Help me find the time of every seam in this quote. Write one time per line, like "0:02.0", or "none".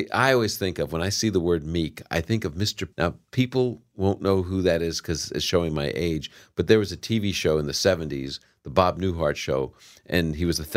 0:02.9